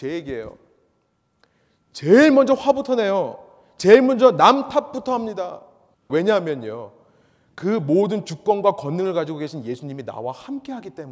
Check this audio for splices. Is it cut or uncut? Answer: cut